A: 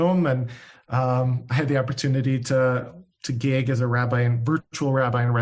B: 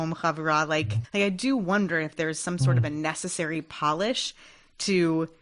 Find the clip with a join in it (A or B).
B